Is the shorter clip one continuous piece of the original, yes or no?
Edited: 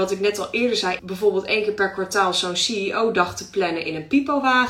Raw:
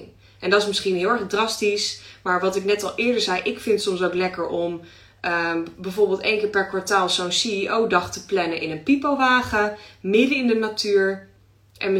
no